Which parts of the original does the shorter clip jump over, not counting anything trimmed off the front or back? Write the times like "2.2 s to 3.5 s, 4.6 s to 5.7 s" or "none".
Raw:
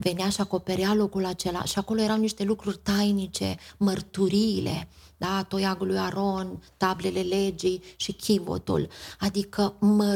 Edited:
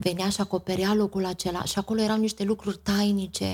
none